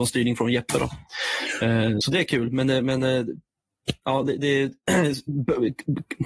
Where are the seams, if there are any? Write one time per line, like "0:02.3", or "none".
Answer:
none